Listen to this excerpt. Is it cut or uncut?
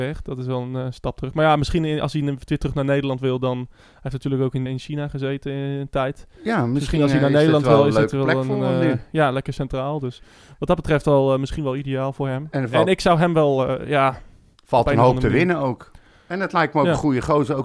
cut